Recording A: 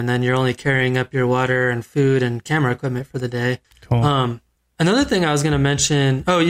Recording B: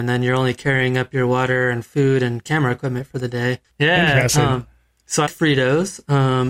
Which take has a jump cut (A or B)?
B